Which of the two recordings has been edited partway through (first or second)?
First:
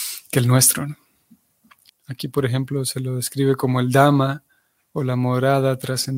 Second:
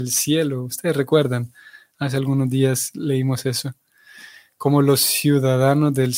first